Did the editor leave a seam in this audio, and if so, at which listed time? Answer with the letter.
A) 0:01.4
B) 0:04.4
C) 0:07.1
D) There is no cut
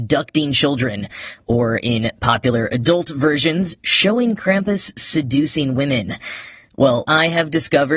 C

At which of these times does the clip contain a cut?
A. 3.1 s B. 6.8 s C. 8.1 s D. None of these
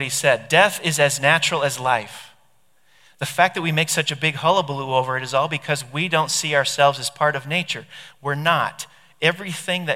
C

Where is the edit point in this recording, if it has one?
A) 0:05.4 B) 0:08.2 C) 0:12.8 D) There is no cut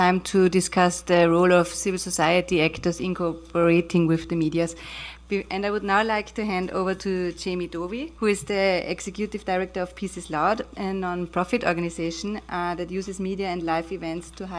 B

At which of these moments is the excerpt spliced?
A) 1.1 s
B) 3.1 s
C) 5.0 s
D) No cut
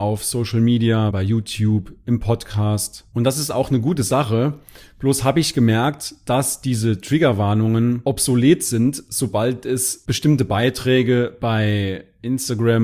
A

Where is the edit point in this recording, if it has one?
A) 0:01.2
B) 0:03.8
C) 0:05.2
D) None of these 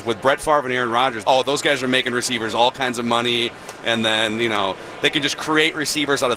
A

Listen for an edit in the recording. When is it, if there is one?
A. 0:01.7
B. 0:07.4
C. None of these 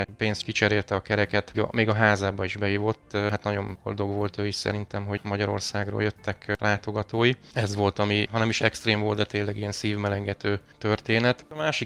C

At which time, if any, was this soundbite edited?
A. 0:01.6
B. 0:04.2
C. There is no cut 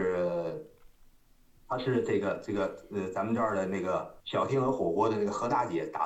B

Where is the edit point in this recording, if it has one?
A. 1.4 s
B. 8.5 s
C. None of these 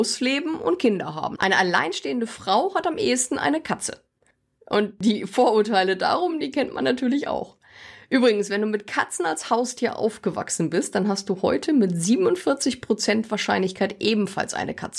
A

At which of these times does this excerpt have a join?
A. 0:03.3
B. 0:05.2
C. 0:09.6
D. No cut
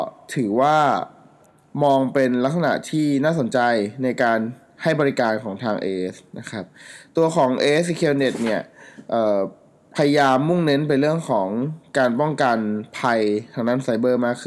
D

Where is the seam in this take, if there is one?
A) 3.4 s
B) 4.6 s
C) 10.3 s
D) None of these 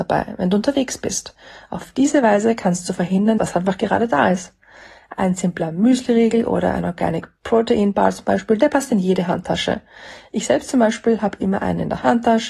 A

